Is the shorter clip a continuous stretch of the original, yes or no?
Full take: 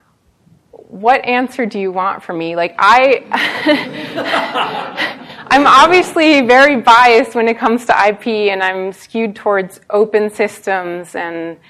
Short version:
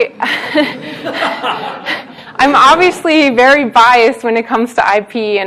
yes